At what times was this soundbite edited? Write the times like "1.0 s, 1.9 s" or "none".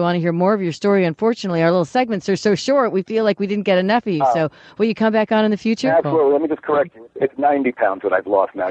none